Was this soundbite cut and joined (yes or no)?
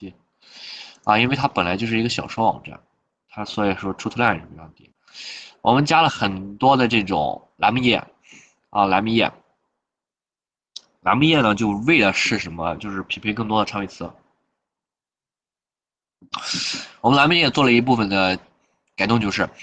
no